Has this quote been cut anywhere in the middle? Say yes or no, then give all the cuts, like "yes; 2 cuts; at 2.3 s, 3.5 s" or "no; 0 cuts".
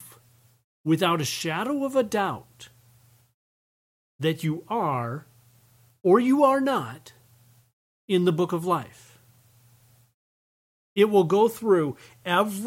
no; 0 cuts